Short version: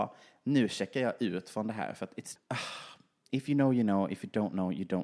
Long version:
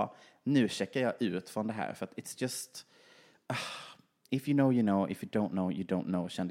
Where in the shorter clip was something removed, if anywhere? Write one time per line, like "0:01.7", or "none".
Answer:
0:02.4

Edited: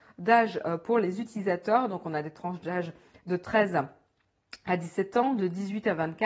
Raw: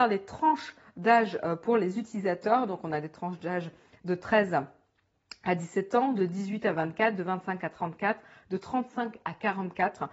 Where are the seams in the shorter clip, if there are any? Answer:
none

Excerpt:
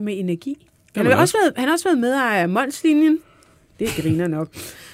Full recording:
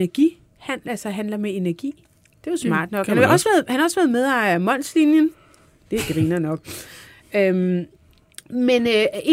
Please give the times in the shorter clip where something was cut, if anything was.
0:00.9

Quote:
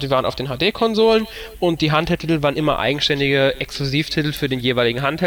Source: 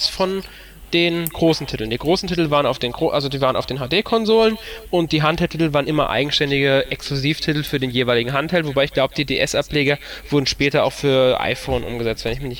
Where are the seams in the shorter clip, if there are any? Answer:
none

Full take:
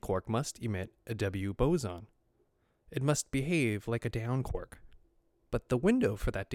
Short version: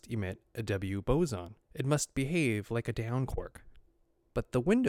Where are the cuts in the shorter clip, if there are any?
0:01.6

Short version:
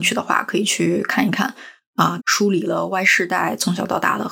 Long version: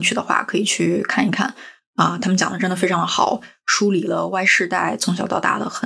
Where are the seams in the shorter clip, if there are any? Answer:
0:02.2

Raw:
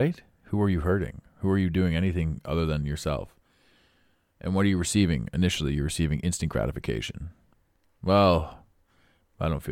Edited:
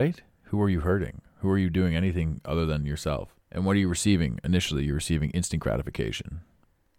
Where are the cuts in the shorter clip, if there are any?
0:03.4

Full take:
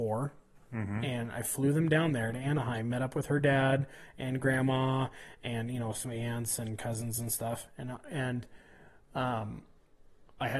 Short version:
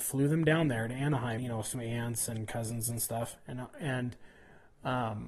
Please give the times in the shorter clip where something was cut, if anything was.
0:01.4

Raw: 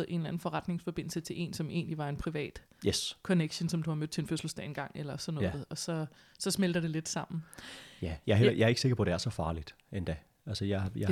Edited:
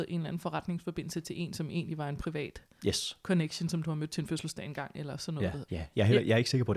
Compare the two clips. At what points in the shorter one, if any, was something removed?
0:05.7

